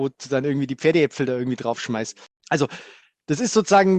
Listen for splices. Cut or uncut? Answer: uncut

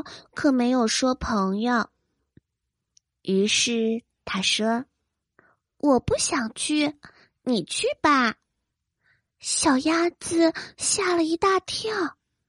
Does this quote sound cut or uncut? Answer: cut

